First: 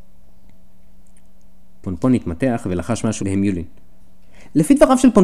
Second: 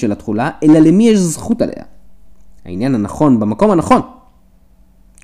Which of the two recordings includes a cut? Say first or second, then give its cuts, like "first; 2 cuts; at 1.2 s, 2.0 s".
first; 1 cut; at 3.2 s